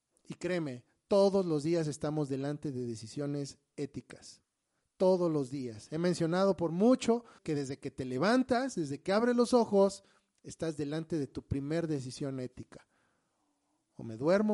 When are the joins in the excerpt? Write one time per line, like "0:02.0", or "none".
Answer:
0:07.4